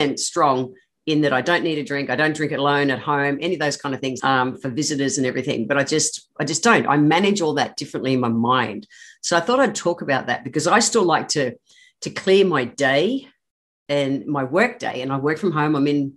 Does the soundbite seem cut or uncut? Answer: cut